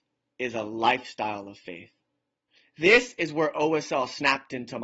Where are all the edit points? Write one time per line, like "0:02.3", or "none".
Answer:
none